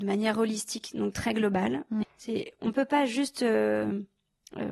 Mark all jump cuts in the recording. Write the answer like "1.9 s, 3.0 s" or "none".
2.0 s